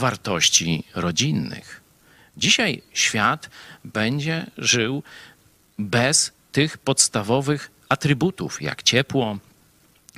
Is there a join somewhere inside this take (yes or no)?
no